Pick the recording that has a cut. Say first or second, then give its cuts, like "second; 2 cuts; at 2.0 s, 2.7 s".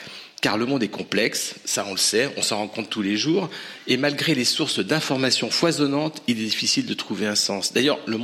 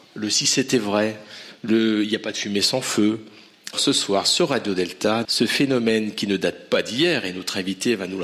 second; 2 cuts; at 3.7 s, 5.2 s